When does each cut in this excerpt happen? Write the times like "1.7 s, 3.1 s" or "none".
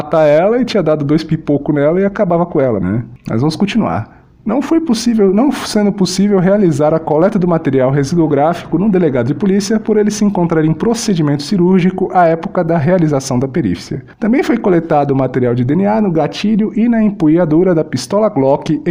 2.8 s